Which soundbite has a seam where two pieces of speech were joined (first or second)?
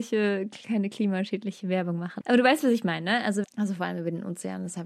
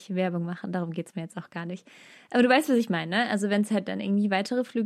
first